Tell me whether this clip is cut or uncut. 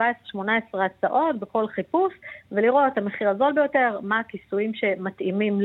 uncut